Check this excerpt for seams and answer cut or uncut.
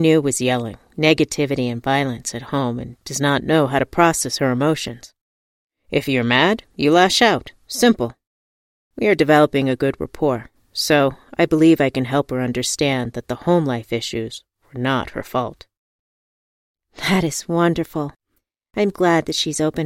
cut